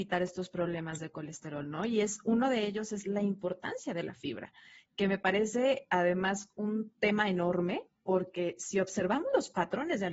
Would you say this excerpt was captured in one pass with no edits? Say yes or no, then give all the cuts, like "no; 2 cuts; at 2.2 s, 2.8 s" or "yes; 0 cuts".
yes; 0 cuts